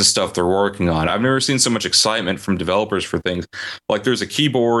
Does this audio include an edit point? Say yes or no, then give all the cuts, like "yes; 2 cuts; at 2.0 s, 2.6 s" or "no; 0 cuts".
no; 0 cuts